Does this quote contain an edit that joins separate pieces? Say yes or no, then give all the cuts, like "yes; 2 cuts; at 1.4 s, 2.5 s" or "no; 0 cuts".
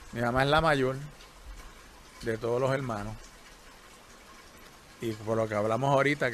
no; 0 cuts